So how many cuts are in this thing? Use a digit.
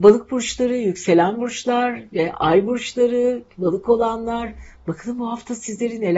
0